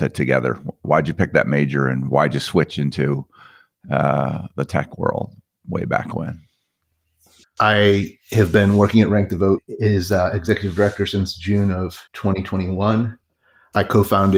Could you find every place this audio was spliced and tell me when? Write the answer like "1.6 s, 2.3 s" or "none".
7.4 s, 12.1 s